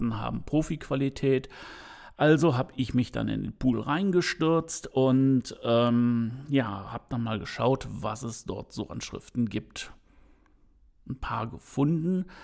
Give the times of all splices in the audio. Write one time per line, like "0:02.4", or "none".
none